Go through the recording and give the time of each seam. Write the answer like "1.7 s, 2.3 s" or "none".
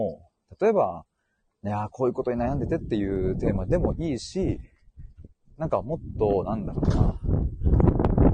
none